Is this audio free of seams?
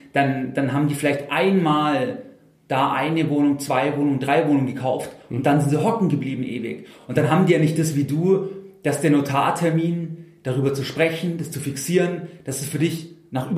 yes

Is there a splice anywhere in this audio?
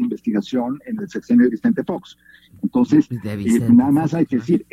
no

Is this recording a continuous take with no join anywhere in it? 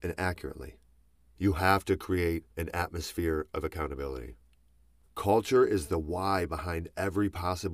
no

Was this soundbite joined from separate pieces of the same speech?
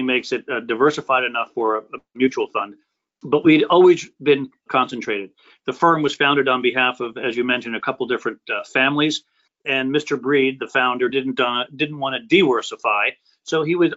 yes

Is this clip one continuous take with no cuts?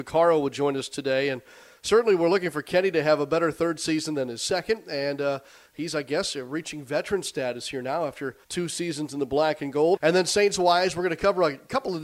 no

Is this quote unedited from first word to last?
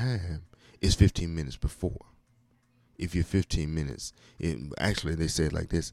yes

